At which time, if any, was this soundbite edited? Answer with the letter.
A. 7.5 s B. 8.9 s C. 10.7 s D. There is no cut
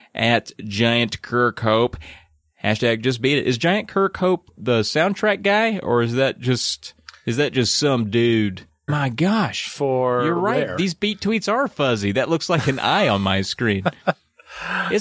B